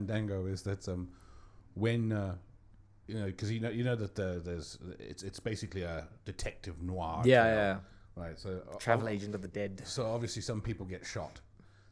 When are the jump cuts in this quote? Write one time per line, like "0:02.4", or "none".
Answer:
none